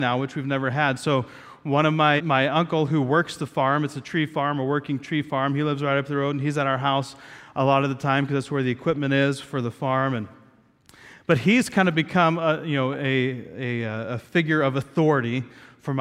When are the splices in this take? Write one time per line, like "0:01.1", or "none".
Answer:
0:02.2